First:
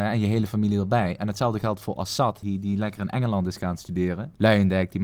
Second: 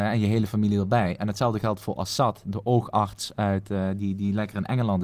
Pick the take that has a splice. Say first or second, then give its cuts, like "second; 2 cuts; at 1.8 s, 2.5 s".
first; 1 cut; at 2.4 s